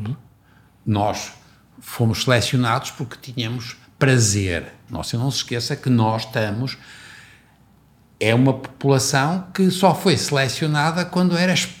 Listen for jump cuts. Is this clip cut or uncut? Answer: cut